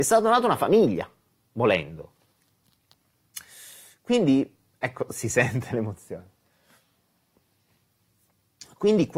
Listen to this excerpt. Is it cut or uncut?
uncut